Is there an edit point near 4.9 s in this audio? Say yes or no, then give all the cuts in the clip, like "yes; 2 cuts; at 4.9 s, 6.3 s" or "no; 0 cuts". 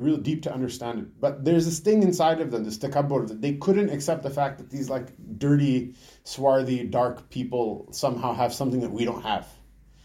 no; 1 cut; at 3.3 s